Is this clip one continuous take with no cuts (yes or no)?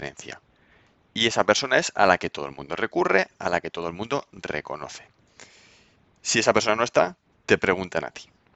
yes